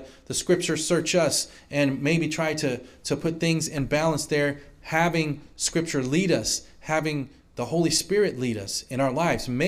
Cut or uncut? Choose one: uncut